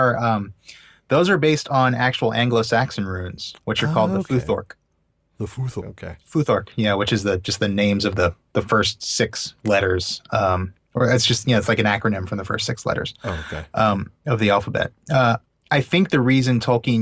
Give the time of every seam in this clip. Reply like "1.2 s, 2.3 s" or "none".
5.8 s